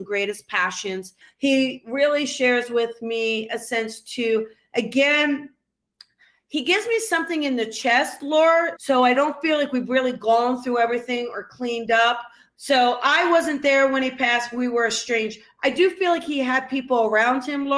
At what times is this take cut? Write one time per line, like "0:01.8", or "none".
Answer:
0:01.2
0:08.8